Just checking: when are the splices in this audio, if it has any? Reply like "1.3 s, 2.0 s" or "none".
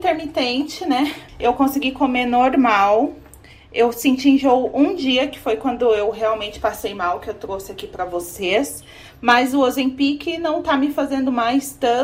1.3 s